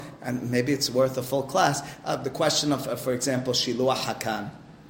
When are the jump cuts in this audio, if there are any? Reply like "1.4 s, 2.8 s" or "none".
none